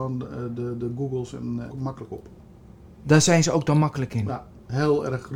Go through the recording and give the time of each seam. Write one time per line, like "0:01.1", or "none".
0:01.7